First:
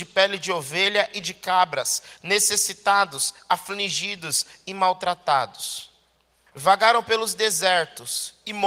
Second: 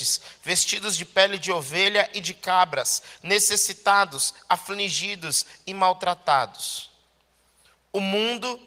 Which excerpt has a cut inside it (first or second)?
first